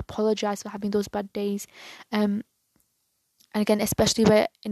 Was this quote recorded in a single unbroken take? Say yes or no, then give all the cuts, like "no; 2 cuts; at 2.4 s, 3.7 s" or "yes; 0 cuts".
yes; 0 cuts